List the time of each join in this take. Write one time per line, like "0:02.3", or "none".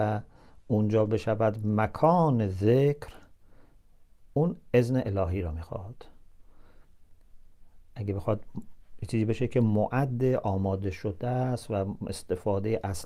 0:04.3